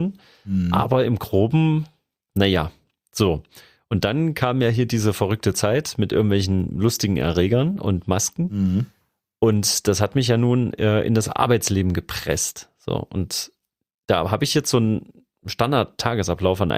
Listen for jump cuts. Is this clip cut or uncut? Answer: uncut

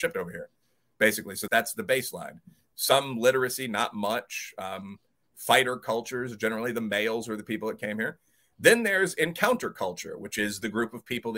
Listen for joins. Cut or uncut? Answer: cut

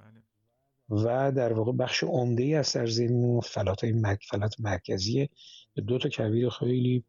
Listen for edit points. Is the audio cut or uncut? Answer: cut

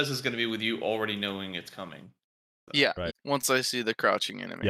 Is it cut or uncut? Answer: cut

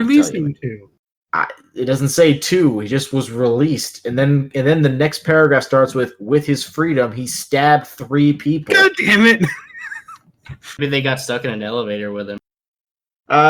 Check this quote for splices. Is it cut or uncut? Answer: cut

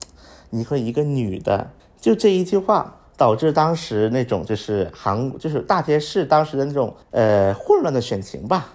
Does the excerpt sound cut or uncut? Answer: cut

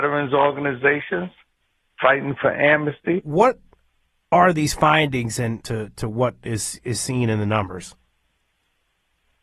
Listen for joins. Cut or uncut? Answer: cut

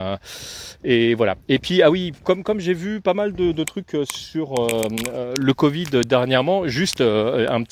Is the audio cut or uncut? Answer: uncut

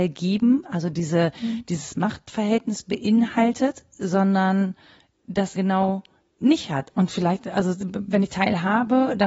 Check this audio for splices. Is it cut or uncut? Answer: cut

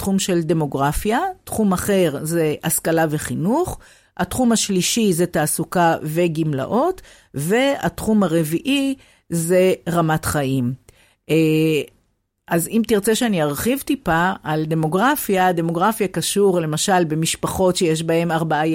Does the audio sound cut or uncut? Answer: uncut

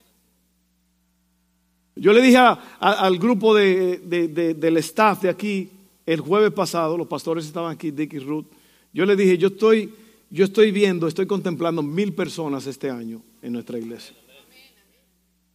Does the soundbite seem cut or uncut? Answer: uncut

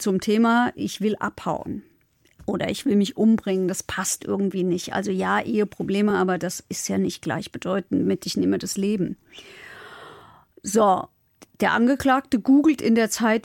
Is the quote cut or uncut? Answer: uncut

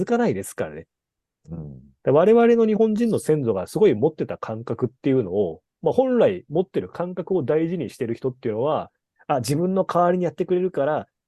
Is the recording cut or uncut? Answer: cut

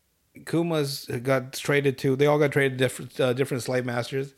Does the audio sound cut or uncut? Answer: uncut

